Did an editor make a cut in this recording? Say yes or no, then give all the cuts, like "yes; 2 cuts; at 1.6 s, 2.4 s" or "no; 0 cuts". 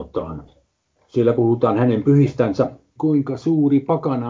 yes; 1 cut; at 3.0 s